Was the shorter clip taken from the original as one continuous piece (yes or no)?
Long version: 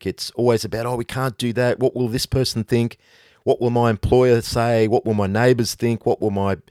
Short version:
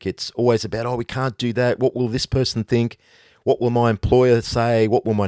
yes